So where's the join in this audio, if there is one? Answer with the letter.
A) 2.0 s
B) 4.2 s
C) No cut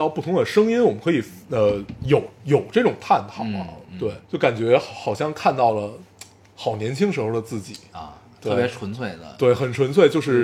B